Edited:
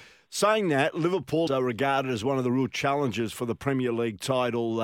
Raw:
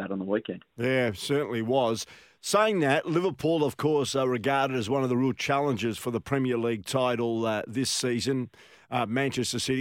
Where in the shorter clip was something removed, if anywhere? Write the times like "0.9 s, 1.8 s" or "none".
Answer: 1.5 s